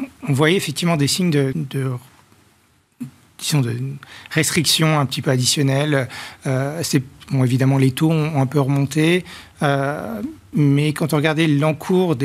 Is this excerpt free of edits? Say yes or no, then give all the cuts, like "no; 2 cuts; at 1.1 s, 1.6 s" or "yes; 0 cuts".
no; 1 cut; at 1.5 s